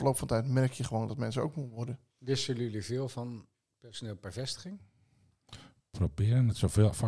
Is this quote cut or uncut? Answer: uncut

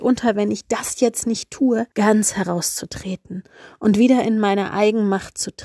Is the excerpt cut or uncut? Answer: cut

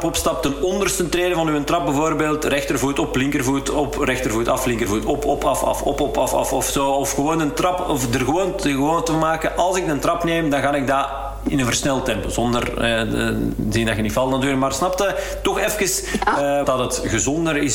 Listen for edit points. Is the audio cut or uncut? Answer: cut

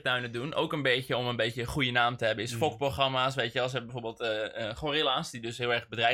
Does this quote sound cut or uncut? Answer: uncut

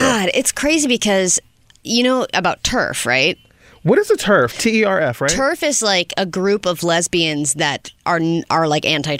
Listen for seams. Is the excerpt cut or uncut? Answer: uncut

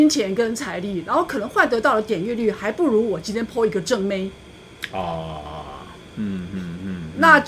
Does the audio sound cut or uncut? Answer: uncut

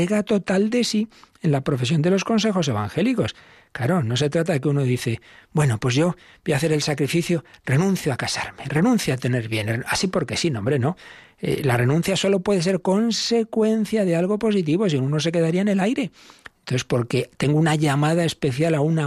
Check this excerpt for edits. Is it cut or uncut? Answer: uncut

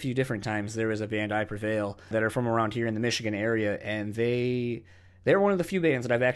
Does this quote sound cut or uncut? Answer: cut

